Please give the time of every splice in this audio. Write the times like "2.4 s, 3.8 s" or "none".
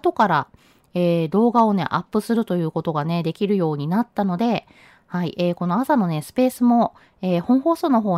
none